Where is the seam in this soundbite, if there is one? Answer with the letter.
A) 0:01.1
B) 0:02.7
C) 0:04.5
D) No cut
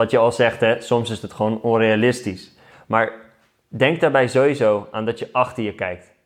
B